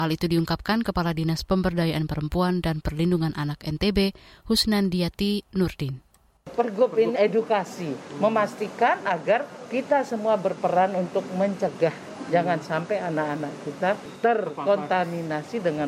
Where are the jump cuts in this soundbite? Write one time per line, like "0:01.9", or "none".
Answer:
0:07.2